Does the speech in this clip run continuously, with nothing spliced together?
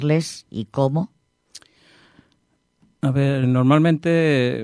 no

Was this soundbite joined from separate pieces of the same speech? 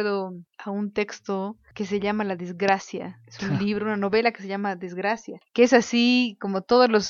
no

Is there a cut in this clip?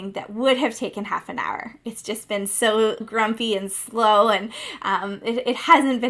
yes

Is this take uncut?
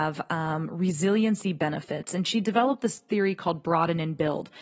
yes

